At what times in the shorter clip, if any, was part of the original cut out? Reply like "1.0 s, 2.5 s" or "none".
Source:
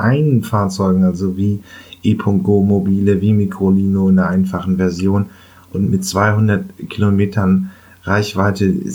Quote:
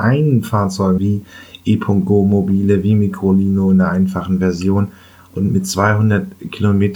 1.0 s

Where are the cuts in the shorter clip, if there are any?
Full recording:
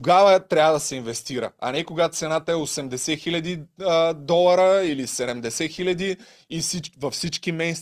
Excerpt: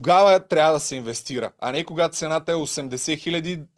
none

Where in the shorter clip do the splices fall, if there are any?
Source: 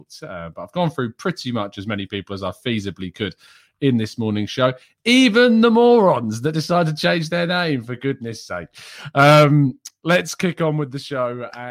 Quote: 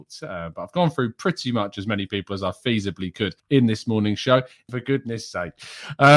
3.4 s, 4.7 s

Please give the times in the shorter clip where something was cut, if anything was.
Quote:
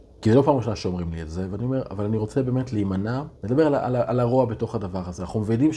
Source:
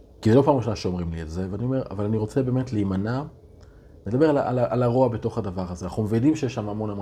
3.4 s

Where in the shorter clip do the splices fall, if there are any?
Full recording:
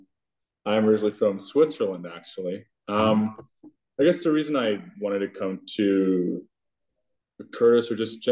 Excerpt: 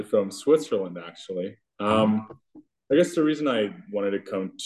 none

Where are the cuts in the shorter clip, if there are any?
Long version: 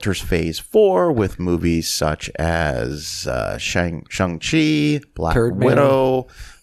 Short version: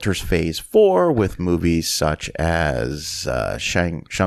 none

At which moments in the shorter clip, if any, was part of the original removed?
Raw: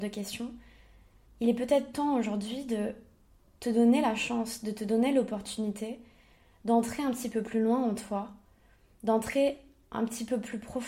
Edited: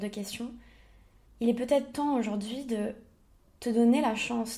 none

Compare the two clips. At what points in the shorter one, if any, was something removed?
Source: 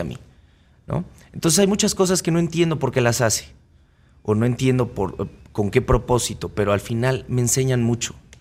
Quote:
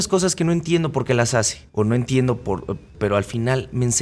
1.7 s, 2.9 s

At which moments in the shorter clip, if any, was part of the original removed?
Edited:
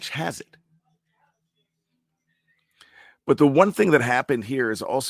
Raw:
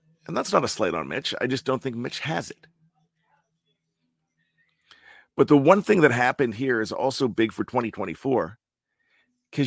none

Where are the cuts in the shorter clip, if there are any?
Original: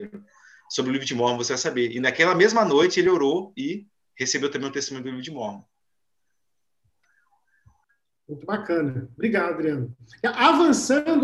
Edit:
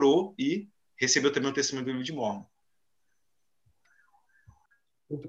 none

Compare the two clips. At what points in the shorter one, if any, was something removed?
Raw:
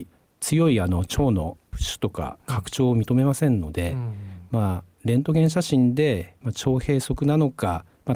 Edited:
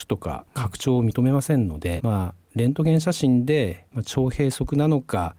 2.0 s

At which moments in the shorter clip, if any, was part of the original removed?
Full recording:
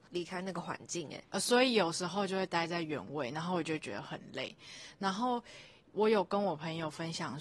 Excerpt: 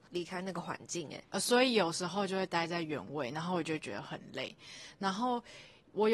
none

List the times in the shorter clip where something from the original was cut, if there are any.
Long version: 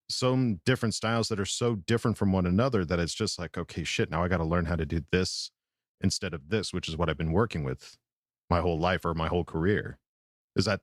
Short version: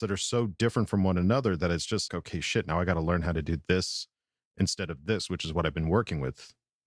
2.1 s

